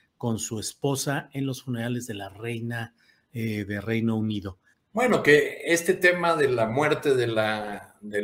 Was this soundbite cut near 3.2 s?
no; 1 cut; at 4.7 s

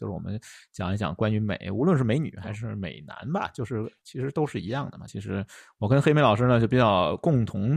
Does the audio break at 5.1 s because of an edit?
yes; 1 cut; at 5.1 s

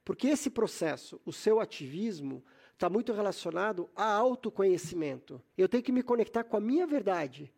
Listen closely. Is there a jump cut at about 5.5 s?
yes; 1 cut; at 5.5 s

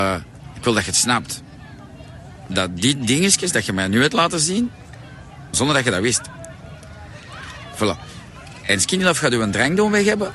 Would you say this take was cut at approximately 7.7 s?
no; 1 cut; at 5.5 s

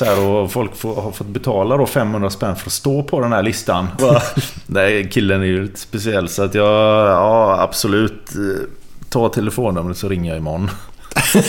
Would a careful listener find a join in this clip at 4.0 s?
yes; 1 cut; at 4.0 s

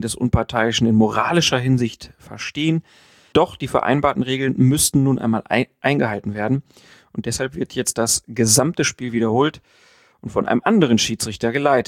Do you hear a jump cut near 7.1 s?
no; 1 cut; at 3.3 s

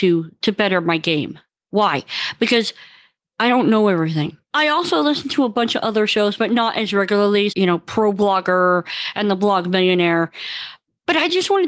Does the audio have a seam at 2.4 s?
no; 2 cuts; at 4.4 s, 7.5 s

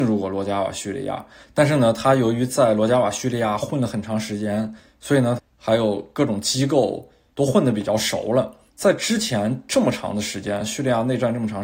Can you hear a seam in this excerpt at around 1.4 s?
yes; 3 cuts; at 1.4 s, 5.4 s, 8.7 s

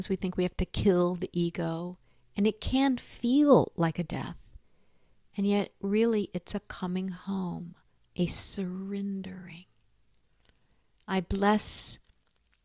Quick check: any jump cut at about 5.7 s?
no; 1 cut; at 8.1 s

